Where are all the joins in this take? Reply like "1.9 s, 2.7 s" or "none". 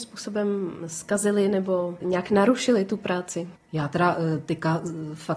3.6 s